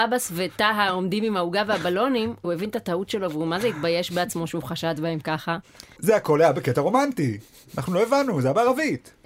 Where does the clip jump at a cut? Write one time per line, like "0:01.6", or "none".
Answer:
0:06.0